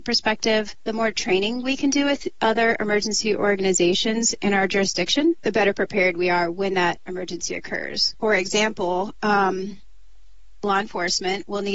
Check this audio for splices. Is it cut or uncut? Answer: uncut